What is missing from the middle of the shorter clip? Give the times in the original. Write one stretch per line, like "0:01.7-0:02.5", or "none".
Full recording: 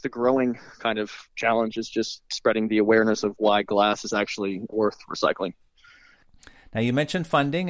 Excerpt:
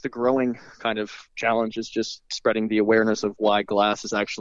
none